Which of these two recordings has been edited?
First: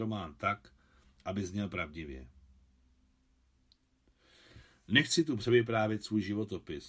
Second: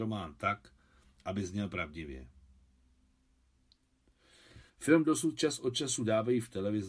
second; 1 cut; at 4.7 s

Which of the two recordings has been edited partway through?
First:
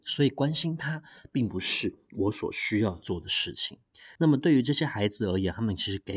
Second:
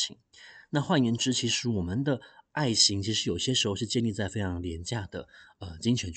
first; 1 cut; at 4.2 s

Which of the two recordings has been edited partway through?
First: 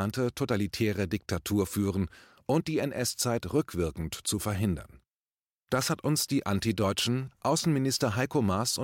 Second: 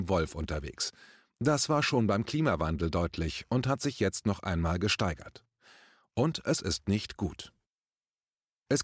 first; 1 cut; at 7.3 s

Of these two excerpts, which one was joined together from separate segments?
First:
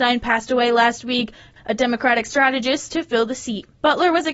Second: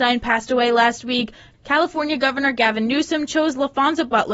first; 1 cut; at 1.6 s

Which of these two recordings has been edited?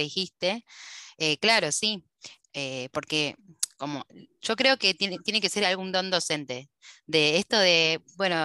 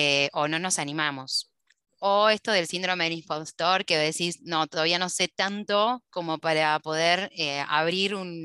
first; 1 cut; at 2.4 s

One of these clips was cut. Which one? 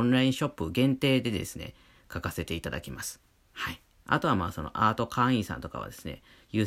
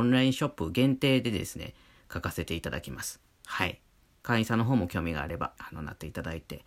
second; 2 cuts; at 3.4 s, 5.6 s

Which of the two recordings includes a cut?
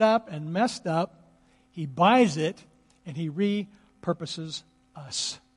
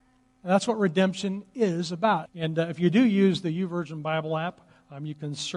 second; 1 cut; at 2.3 s

